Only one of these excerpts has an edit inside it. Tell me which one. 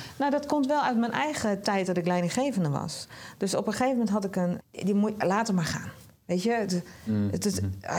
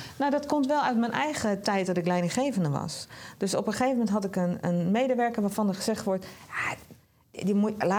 first; 1 cut; at 4.6 s

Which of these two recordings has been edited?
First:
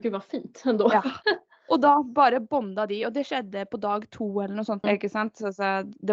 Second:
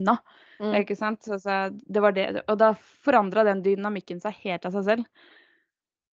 first; 1 cut; at 4.8 s

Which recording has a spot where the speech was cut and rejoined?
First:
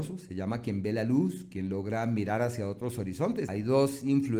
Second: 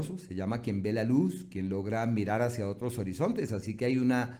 first; 1 cut; at 3.5 s

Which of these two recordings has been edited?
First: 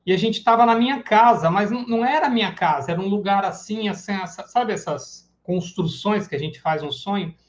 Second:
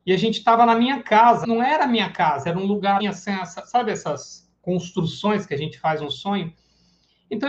second; 2 cuts; at 1.4 s, 3.0 s

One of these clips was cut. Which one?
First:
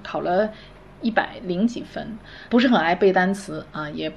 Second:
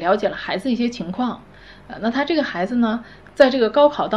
first; 1 cut; at 2.5 s

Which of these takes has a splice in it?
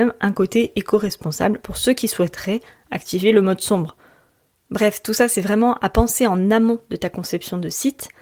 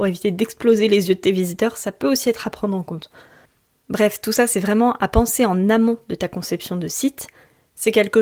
first; 1 cut; at 4.6 s

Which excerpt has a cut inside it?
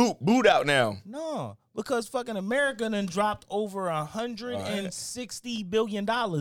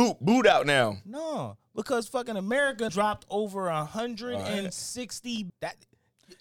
second; 2 cuts; at 2.9 s, 5.5 s

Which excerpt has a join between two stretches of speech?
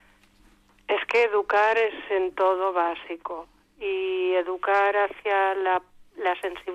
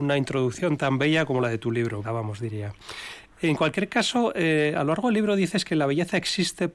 second; 1 cut; at 2.0 s

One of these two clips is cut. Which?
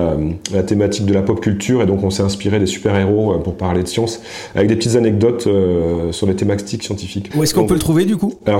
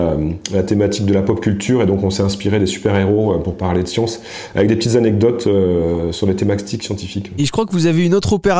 first; 1 cut; at 7.3 s

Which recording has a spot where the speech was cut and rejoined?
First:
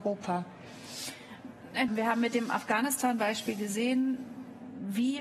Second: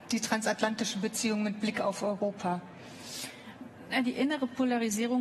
first; 1 cut; at 1.9 s

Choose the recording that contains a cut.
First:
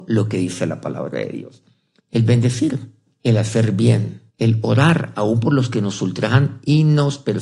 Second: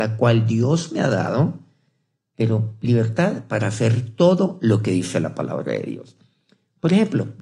first; 2 cuts; at 2.0 s, 4.3 s

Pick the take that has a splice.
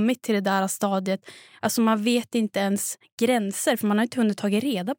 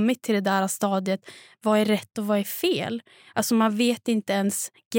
first; 1 cut; at 1.5 s

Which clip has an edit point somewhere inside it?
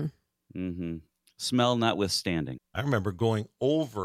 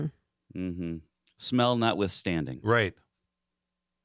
first; 1 cut; at 2.6 s

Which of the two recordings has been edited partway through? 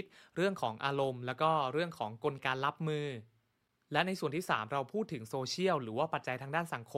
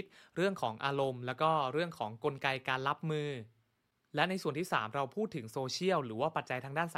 first; 1 cut; at 2.4 s

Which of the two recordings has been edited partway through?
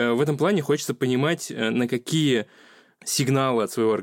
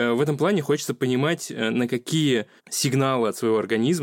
second; 1 cut; at 2.6 s

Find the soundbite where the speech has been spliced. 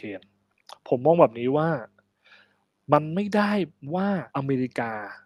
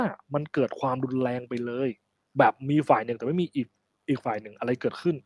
first; 1 cut; at 4.3 s

